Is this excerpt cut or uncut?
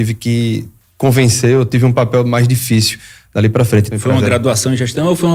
cut